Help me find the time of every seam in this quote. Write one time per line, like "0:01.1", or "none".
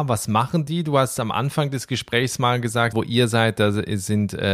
0:02.9